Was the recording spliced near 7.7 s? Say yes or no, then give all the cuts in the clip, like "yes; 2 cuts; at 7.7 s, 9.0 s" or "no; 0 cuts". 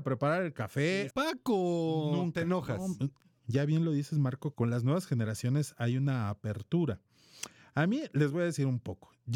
no; 3 cuts; at 1.1 s, 3.4 s, 4.5 s